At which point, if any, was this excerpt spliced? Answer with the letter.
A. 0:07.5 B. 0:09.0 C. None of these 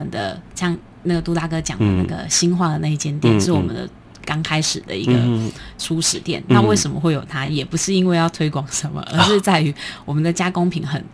C